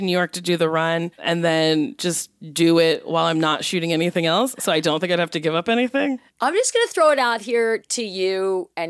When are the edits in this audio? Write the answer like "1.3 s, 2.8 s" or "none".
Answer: none